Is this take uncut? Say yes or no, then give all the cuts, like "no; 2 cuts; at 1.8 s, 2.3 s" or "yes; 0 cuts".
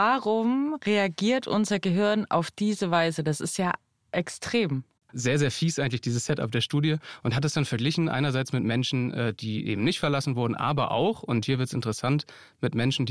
no; 1 cut; at 5.1 s